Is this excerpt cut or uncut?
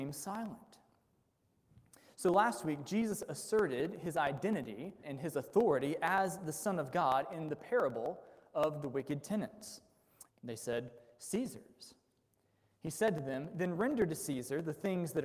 cut